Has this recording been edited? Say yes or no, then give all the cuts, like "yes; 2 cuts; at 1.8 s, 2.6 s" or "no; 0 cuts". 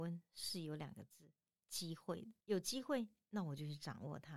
yes; 1 cut; at 2.4 s